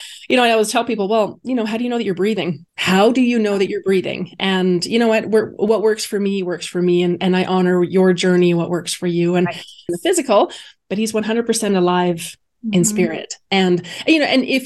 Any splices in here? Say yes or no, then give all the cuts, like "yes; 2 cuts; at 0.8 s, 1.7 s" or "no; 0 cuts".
yes; 2 cuts; at 2.7 s, 9.9 s